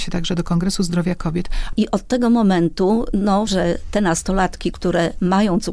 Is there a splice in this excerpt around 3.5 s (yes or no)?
yes